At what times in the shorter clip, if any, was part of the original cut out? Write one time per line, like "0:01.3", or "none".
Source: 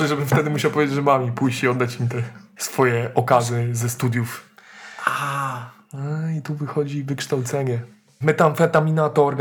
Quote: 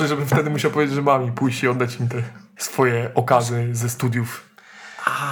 none